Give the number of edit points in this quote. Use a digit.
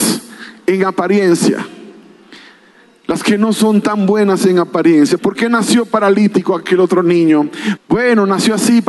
2